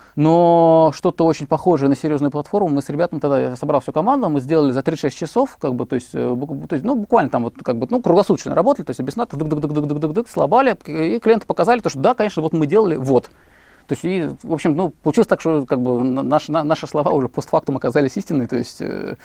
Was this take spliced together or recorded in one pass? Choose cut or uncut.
uncut